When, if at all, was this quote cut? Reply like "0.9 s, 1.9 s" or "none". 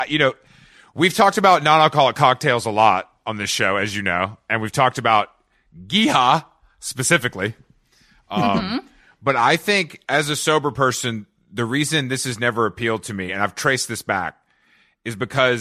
none